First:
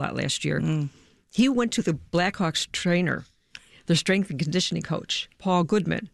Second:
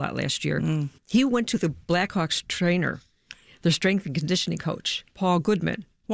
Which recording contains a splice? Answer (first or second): second